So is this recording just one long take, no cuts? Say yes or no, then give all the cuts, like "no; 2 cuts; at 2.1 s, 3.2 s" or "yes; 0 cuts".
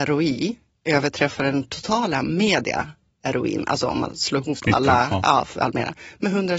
yes; 0 cuts